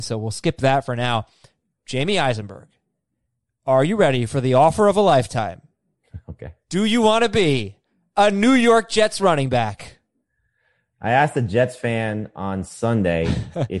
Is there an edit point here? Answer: no; 0 cuts

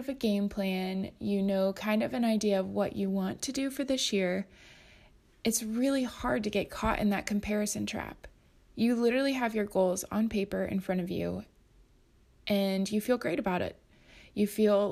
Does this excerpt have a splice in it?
no; 0 cuts

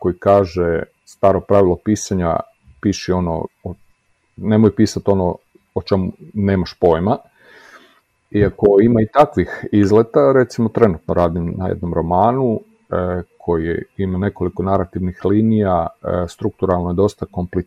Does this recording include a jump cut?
no; 0 cuts

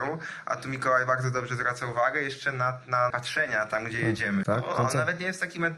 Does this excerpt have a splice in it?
yes; 2 cuts; at 3.1 s, 4.4 s

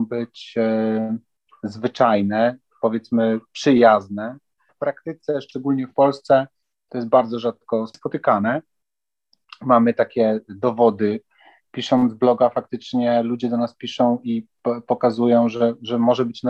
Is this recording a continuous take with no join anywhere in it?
no; 1 cut; at 4.7 s

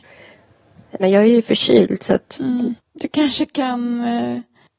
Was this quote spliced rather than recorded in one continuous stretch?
yes; 2 cuts; at 1.0 s, 2.8 s

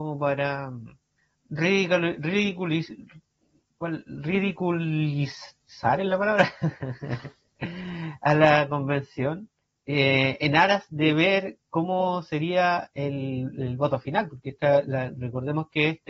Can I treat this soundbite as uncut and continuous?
yes; 0 cuts

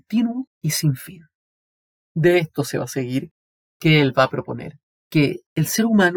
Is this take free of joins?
yes; 0 cuts

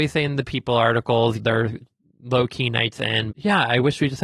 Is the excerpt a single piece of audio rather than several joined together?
no; 2 cuts; at 1.4 s, 3.3 s

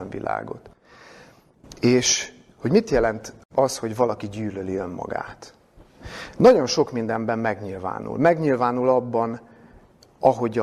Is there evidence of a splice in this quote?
no; 0 cuts

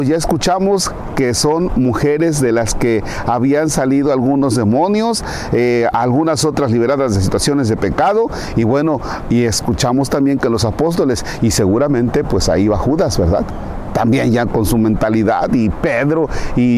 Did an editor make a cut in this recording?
no; 0 cuts

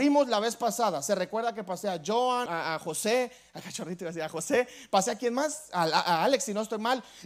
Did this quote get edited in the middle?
yes; 1 cut; at 2.5 s

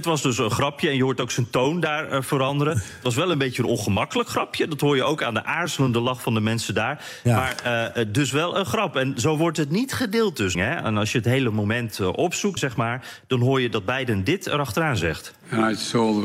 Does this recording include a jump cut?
yes; 2 cuts; at 10.5 s, 12.6 s

